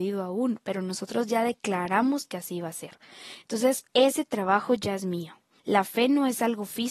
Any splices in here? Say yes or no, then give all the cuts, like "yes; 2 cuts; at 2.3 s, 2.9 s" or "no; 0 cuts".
yes; 2 cuts; at 3.9 s, 5.6 s